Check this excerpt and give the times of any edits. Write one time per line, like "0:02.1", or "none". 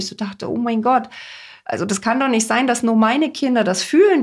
none